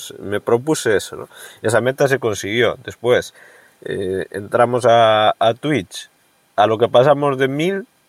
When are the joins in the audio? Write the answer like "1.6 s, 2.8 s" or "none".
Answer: none